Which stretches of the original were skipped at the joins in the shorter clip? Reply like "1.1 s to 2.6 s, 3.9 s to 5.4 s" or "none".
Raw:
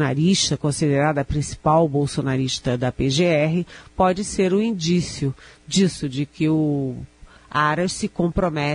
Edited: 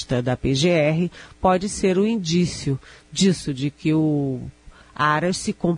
none